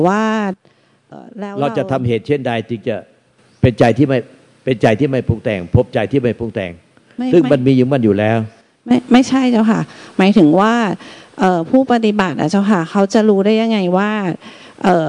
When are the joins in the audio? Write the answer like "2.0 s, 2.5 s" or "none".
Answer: 1.1 s